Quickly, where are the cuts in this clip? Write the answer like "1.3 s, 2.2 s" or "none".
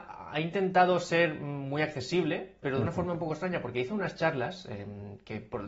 none